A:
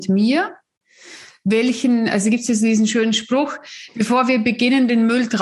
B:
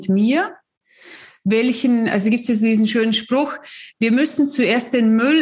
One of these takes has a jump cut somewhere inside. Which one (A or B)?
A